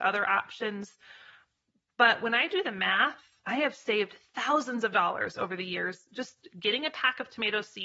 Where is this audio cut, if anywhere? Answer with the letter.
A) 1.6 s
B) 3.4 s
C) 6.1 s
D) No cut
B